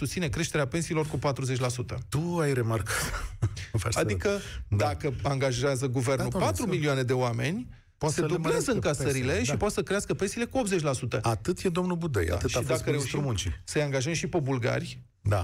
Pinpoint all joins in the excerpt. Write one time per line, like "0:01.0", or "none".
none